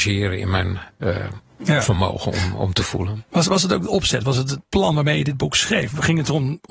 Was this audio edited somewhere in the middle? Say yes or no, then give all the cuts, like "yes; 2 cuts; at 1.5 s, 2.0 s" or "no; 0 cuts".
no; 0 cuts